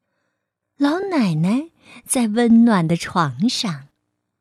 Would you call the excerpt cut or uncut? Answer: uncut